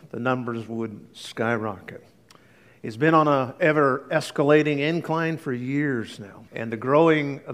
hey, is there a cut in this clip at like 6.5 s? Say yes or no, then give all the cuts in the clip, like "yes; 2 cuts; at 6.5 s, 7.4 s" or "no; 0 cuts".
yes; 1 cut; at 6.5 s